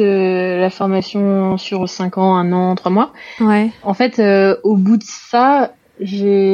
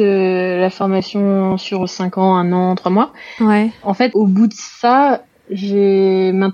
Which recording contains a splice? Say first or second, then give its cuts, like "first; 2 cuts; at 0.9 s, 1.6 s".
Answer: second; 1 cut; at 4.1 s